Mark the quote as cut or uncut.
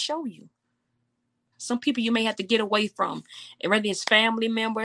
cut